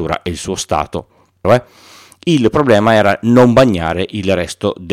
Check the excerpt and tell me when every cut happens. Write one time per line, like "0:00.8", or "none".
0:01.4